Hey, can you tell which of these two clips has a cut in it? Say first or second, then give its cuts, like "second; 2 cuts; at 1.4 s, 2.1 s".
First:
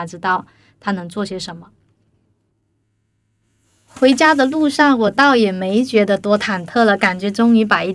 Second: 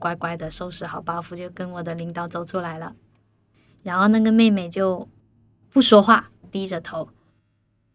second; 1 cut; at 3.5 s